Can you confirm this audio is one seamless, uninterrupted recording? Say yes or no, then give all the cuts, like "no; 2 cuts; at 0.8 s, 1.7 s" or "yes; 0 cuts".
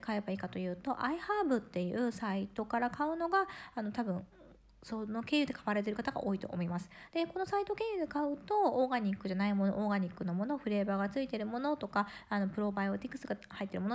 yes; 0 cuts